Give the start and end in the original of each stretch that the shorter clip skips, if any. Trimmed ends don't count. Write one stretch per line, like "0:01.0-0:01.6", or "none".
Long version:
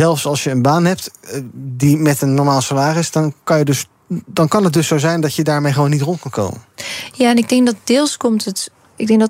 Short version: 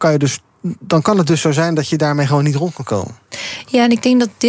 none